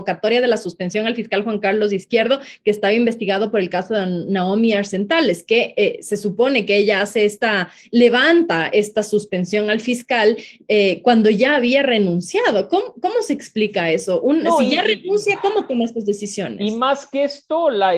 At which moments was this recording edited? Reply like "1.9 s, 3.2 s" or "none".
none